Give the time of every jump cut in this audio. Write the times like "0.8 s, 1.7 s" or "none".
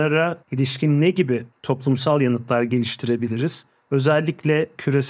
none